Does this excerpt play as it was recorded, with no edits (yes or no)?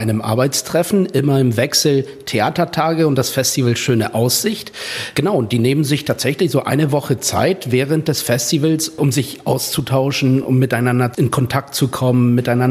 yes